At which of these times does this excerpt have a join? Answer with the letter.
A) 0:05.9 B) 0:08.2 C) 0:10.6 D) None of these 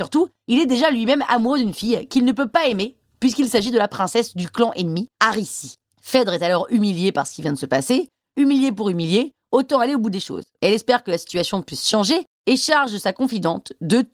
B